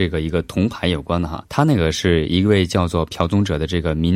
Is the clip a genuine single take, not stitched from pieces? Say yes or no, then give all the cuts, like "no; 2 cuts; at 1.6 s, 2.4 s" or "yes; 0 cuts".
no; 1 cut; at 1.4 s